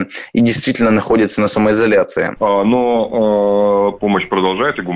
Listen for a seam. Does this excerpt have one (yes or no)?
yes